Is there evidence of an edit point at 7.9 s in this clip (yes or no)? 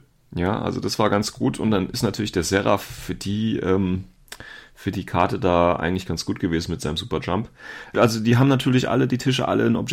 yes